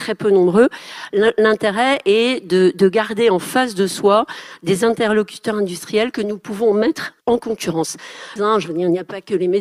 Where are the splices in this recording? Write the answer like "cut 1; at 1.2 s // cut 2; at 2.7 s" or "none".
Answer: cut 1; at 7.2 s // cut 2; at 8.4 s